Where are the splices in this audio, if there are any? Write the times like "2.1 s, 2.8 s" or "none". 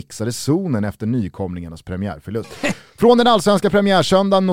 2.4 s

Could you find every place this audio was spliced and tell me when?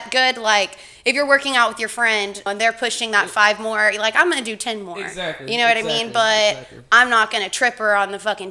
2.5 s

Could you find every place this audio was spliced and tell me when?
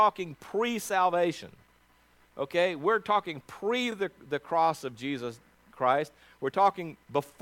none

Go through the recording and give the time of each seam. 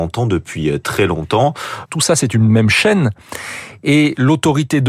1.9 s

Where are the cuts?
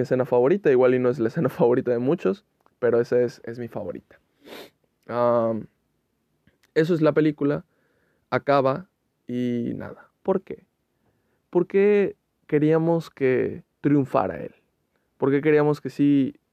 10.1 s, 13.7 s

